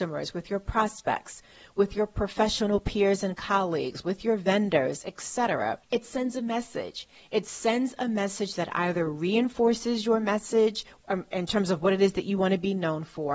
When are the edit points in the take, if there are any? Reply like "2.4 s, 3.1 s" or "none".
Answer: 5.8 s